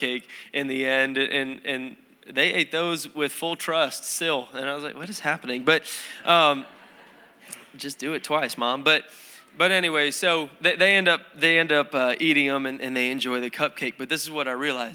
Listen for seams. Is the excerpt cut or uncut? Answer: uncut